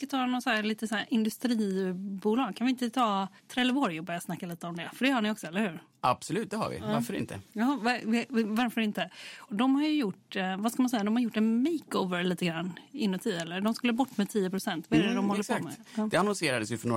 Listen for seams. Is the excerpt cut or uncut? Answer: cut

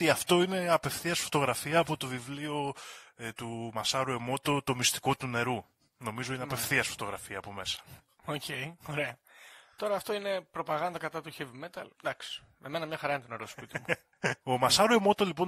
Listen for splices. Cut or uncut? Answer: cut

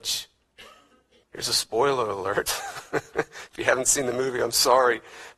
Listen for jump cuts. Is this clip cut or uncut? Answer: cut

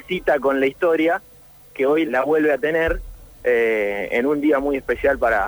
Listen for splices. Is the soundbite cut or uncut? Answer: cut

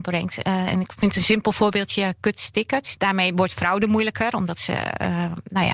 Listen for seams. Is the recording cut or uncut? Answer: cut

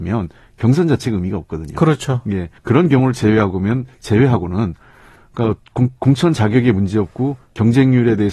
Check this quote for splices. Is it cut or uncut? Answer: cut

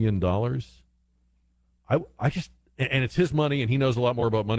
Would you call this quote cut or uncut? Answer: uncut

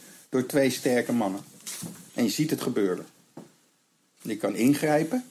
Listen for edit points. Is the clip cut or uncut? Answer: cut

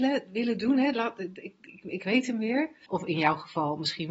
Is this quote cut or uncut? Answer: cut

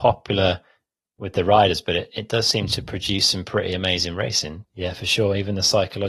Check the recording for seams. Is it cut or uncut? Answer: cut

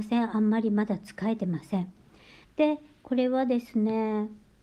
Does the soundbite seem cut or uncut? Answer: cut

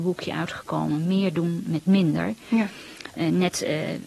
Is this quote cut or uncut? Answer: uncut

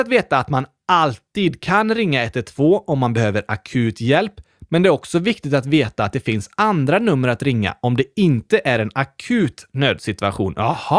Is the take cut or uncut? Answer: uncut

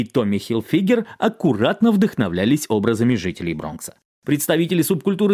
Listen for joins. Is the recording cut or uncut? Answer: uncut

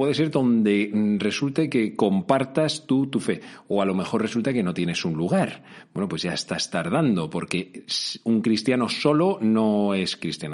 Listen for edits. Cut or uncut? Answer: uncut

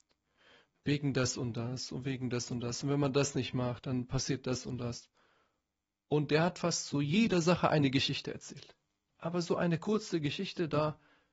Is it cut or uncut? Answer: cut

